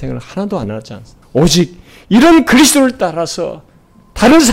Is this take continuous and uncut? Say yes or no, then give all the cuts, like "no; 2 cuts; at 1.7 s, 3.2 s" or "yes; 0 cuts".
no; 1 cut; at 1.2 s